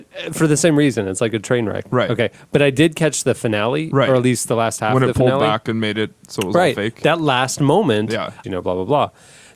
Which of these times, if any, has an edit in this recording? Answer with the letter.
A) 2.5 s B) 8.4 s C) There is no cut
B